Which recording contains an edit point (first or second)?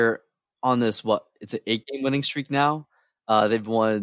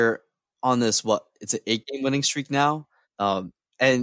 second